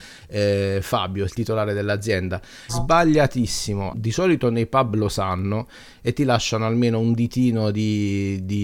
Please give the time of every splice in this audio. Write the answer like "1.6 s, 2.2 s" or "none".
1.3 s, 2.7 s, 3.9 s